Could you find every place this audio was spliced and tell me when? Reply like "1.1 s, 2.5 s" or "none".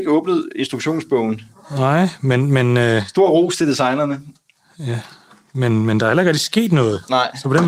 none